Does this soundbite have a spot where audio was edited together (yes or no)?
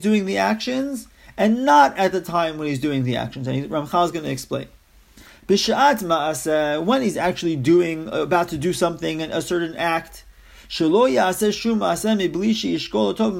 no